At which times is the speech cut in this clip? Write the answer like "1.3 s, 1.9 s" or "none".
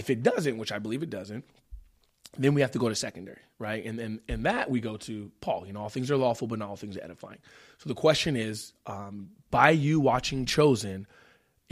none